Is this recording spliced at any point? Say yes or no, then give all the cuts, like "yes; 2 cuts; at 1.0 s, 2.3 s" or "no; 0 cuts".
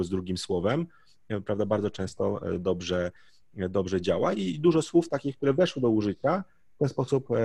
no; 0 cuts